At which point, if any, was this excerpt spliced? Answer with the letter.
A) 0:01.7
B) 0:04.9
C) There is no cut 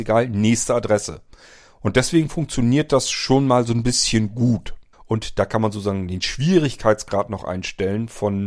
B